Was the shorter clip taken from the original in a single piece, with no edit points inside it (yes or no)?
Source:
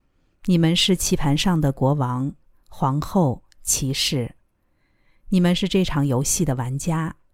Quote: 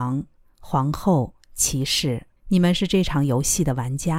no